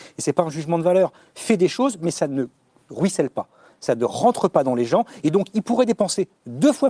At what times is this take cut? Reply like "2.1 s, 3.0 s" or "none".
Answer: none